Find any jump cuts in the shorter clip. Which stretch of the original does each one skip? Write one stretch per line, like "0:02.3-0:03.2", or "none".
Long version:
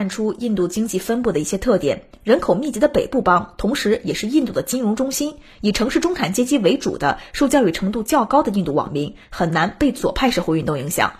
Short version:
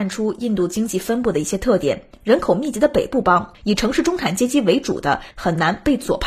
0:03.5-0:05.5
0:07.3-0:09.3